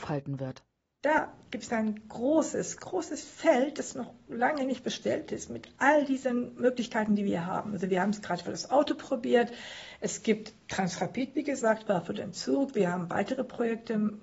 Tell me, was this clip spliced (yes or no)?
no